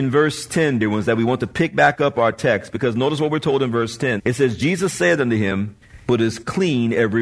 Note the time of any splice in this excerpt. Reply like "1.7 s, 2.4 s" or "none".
4.2 s, 6.1 s